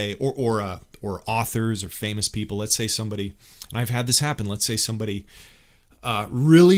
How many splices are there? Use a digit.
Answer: 0